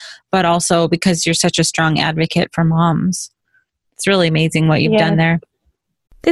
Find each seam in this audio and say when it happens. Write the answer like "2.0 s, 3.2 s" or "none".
none